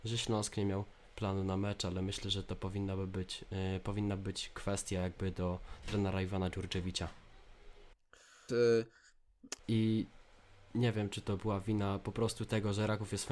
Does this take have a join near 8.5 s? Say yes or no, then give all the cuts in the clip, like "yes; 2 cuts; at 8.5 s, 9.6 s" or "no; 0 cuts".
yes; 2 cuts; at 8.5 s, 9.6 s